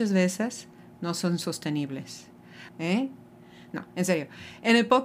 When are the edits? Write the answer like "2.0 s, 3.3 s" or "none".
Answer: 2.7 s